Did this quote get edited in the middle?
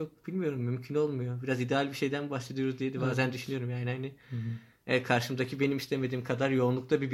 no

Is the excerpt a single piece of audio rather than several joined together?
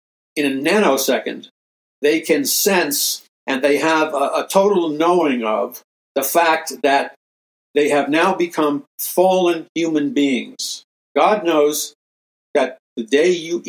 no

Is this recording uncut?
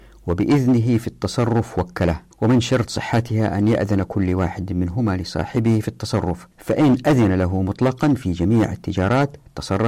no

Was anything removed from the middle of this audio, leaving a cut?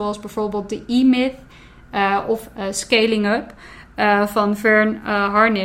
no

